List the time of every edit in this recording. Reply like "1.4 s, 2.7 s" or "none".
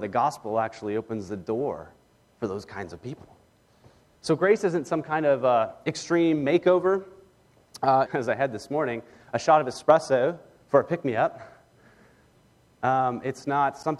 4.1 s, 8.1 s